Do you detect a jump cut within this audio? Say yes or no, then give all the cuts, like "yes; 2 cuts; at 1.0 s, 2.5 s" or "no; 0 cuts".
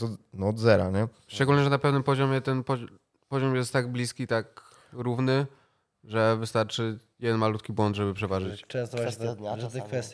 no; 0 cuts